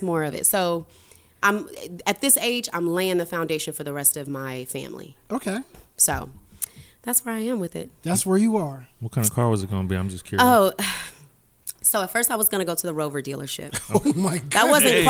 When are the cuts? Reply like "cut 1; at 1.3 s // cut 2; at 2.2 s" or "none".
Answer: none